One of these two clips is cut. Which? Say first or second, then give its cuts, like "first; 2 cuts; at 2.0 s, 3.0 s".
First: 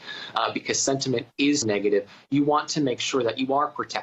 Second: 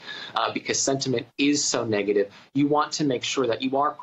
first; 1 cut; at 1.6 s